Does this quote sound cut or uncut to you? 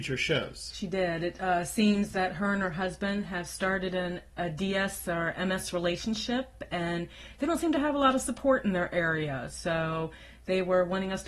uncut